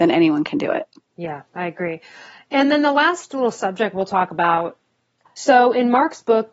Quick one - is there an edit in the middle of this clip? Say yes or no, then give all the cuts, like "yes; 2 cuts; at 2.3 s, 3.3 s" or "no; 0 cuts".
no; 0 cuts